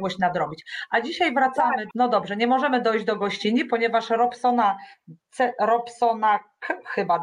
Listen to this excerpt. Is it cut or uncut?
cut